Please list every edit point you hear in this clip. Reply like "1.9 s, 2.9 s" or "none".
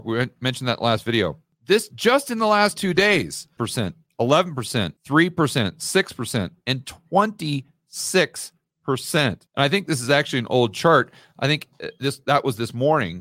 3.6 s